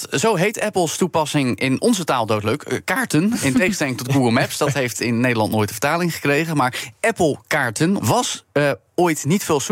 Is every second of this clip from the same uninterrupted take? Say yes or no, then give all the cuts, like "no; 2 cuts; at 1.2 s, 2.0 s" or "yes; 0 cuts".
no; 1 cut; at 8.0 s